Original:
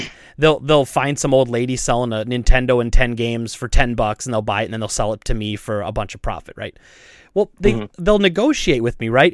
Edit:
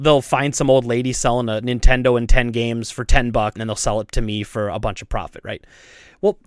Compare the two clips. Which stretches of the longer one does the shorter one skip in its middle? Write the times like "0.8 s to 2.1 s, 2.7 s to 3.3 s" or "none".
4.2 s to 4.7 s